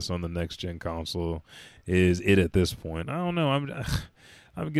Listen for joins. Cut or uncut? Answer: uncut